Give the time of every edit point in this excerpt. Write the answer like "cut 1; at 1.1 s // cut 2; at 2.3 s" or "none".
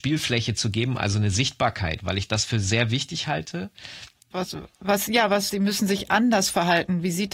cut 1; at 4.3 s // cut 2; at 5.5 s